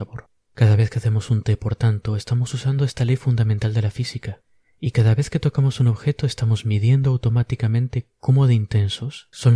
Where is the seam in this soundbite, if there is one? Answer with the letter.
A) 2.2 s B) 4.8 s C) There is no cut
C